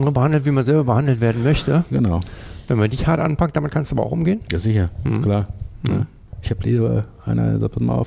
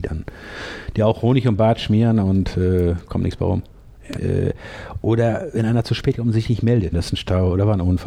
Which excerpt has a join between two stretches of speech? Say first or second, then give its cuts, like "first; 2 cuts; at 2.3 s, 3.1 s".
second; 2 cuts; at 4.2 s, 6.9 s